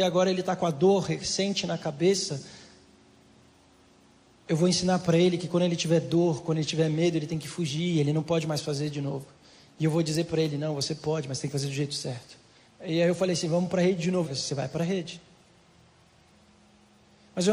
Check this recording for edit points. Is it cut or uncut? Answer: cut